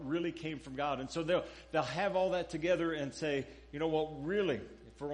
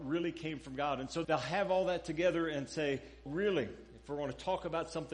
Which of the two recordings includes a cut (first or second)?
second